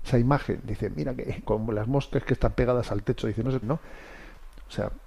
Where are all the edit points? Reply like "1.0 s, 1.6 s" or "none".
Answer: 1.4 s, 3.6 s